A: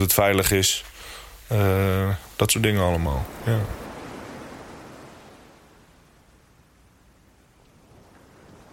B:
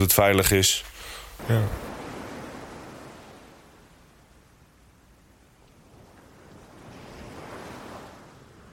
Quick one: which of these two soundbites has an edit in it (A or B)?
B